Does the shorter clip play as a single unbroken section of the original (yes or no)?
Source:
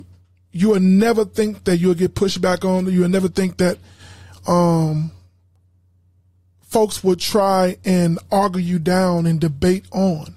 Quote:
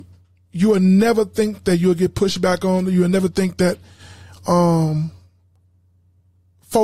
yes